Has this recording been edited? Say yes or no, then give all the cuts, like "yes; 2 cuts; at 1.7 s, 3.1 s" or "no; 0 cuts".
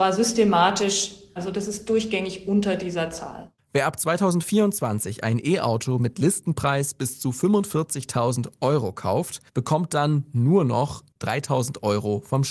yes; 2 cuts; at 3.6 s, 9.5 s